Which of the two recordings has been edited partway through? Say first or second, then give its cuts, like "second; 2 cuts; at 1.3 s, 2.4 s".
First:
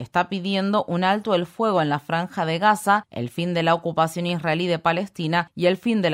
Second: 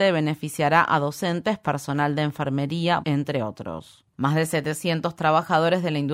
second; 2 cuts; at 3.0 s, 4.1 s